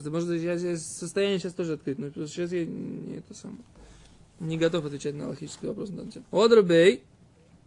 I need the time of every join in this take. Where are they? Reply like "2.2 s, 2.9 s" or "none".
6.2 s